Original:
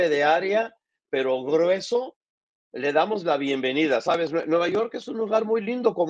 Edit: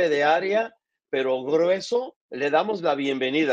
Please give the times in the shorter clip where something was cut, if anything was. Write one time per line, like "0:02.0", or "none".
0:02.2